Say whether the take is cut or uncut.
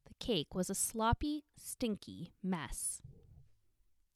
cut